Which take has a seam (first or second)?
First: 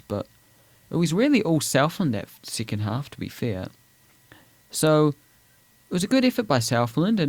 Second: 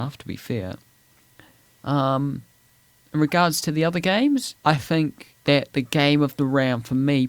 second